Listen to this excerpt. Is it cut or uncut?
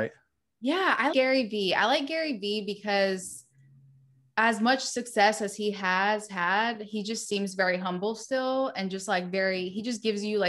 cut